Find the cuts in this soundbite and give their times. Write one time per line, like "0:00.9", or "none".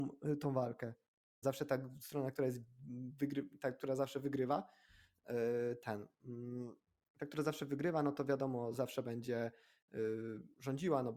0:01.4